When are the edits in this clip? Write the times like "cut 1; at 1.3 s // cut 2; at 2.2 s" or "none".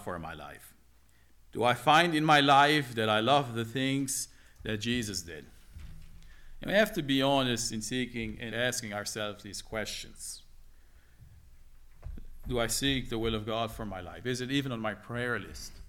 cut 1; at 1.3 s // cut 2; at 8.5 s

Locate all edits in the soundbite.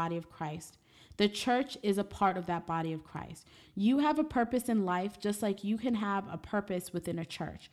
none

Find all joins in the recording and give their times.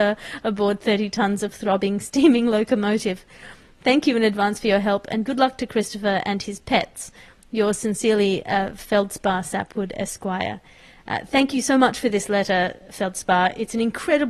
none

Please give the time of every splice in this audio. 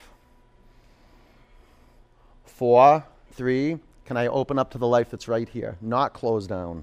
cut 1; at 3.3 s

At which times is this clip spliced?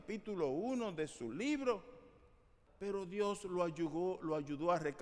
cut 1; at 2.7 s

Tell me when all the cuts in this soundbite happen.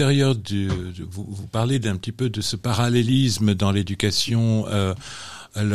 none

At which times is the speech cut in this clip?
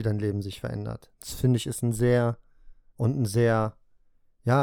cut 1; at 1.1 s // cut 2; at 2.9 s

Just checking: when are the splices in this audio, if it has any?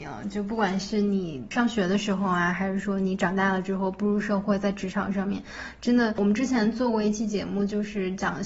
none

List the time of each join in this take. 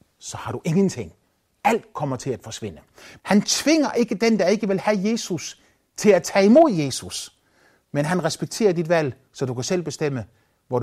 cut 1; at 3.2 s

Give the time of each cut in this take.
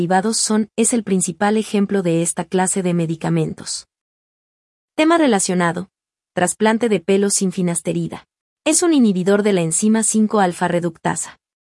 cut 1; at 8.4 s

